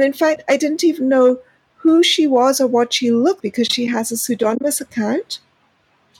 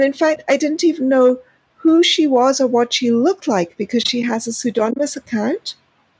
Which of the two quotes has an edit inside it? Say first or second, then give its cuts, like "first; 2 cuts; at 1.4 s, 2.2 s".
first; 1 cut; at 3.4 s